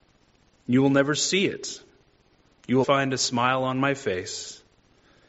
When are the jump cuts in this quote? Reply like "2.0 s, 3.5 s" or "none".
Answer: 2.8 s

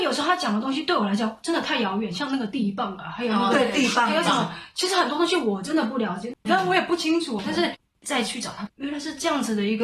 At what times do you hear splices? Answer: 6.5 s, 8.7 s

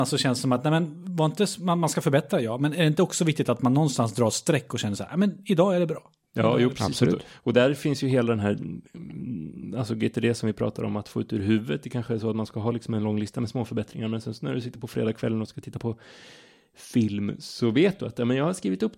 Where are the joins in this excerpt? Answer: none

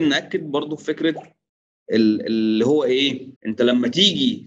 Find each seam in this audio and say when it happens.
3.4 s

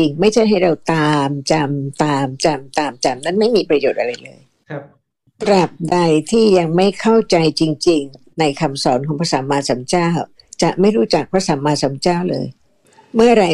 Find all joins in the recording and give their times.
none

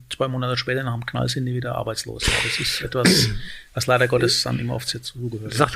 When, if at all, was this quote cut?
none

